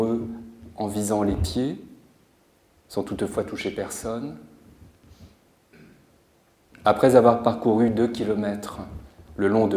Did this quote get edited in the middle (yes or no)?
no